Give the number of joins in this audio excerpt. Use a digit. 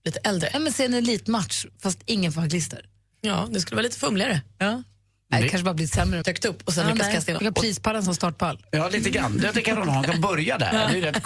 2